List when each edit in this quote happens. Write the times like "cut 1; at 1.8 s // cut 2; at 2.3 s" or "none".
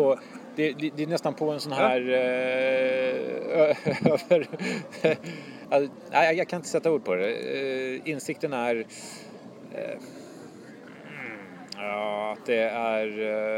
none